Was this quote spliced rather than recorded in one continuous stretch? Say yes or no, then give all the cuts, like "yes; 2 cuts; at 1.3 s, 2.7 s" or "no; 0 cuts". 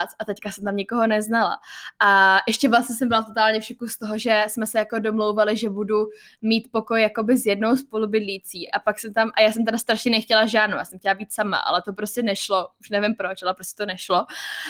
no; 0 cuts